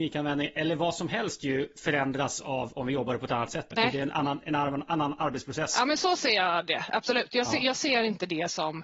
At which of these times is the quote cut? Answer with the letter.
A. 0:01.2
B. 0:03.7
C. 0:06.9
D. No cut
B